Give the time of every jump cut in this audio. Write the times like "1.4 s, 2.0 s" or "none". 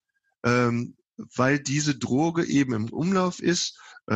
none